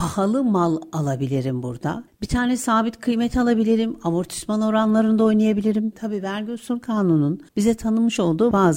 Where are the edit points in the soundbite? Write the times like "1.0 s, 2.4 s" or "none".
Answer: 5.9 s, 7.5 s